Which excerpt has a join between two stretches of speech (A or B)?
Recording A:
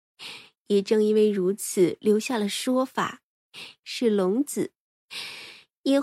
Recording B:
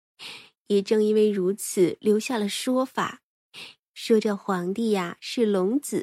A